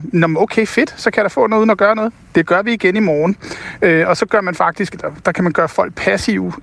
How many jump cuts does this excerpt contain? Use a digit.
0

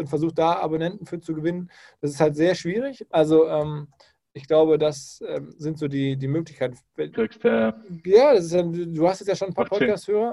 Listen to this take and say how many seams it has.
2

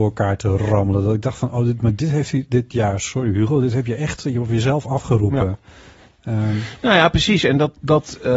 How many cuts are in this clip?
0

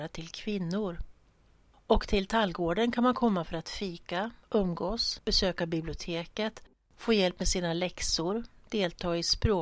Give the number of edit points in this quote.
1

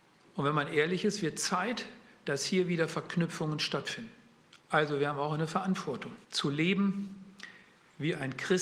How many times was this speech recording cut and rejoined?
2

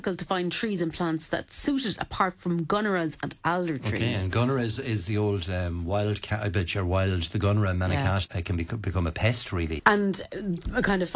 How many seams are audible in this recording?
2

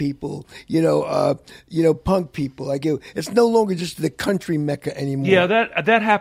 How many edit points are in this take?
0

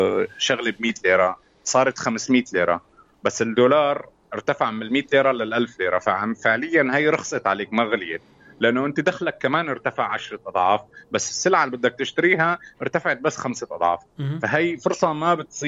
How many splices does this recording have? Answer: 0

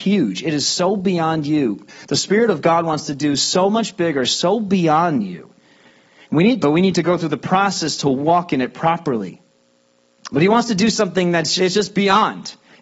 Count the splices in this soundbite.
2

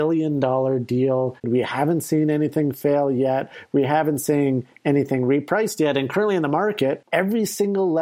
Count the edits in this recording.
1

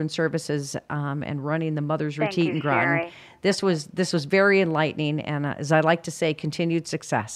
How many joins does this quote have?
0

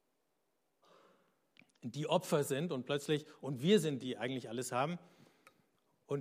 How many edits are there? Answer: 1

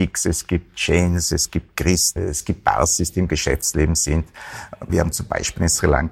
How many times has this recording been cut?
2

